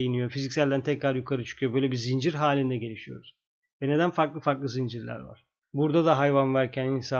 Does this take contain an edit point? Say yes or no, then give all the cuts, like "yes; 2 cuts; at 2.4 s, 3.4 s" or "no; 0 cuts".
yes; 1 cut; at 5.6 s